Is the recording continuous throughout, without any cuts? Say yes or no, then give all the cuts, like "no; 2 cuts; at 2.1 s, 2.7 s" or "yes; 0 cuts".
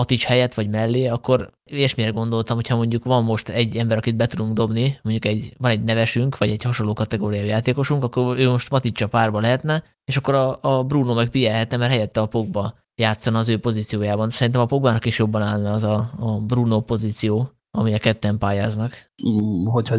yes; 0 cuts